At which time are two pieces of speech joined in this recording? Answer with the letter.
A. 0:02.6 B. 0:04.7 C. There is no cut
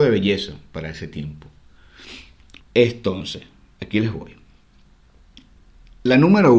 A